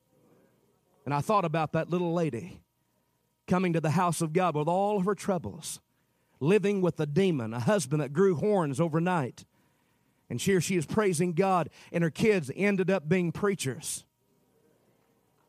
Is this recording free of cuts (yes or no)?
yes